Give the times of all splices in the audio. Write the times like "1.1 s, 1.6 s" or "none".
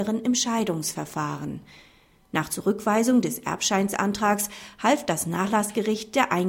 none